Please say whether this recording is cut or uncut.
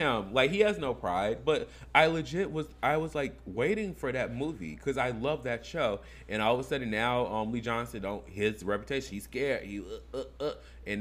uncut